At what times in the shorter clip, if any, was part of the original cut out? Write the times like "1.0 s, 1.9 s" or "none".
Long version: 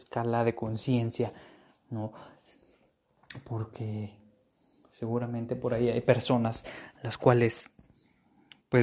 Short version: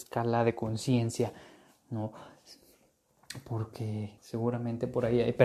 4.2 s

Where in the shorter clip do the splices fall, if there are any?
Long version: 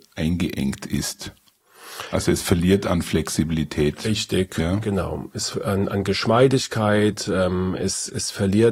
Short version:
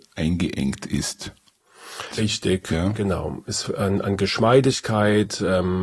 2.1 s

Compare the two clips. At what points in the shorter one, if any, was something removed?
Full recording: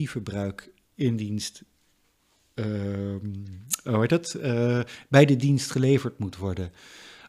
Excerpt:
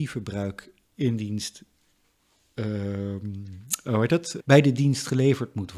4.4 s

